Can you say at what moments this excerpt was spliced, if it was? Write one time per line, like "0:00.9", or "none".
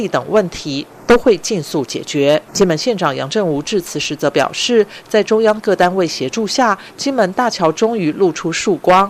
0:02.5